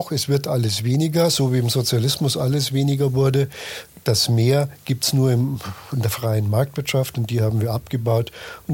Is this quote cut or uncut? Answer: uncut